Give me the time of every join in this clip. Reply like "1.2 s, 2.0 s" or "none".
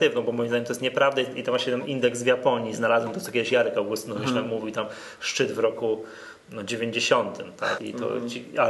7.8 s